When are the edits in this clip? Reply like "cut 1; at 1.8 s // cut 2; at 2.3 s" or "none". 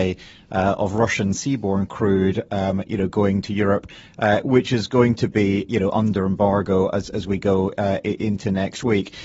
none

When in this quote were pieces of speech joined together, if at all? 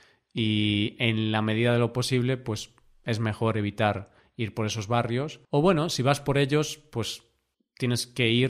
cut 1; at 5.4 s

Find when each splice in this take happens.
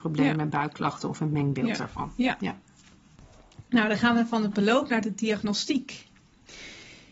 none

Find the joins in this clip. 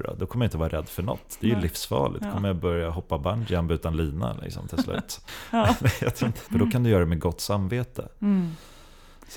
cut 1; at 5.3 s // cut 2; at 6.5 s

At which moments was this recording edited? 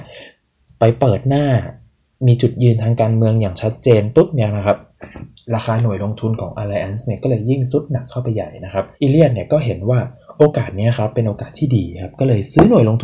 cut 1; at 8.9 s

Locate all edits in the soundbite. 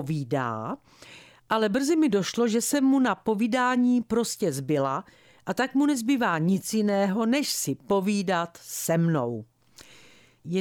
none

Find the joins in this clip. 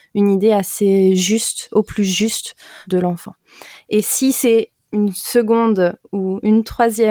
cut 1; at 2.8 s

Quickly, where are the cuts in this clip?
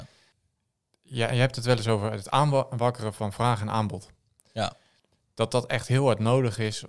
none

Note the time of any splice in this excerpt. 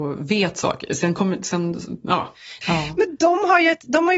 cut 1; at 2.6 s

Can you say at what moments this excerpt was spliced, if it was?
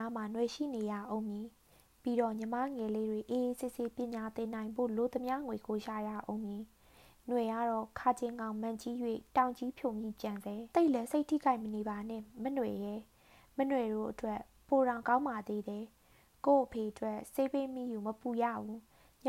cut 1; at 10.7 s

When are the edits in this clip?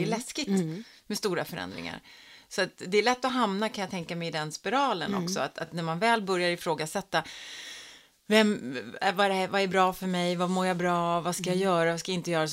none

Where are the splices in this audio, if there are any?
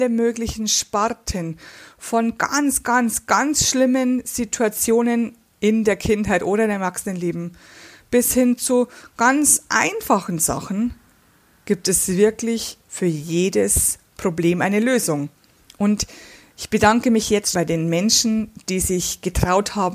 cut 1; at 17.5 s

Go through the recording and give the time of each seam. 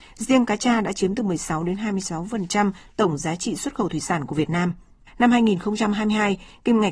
cut 1; at 5.1 s

